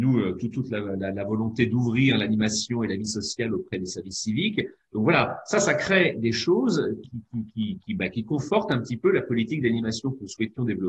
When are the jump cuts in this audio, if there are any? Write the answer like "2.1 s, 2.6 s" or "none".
7.0 s